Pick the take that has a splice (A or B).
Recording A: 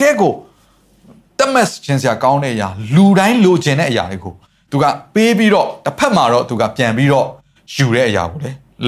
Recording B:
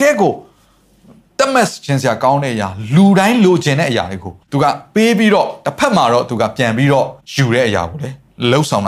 B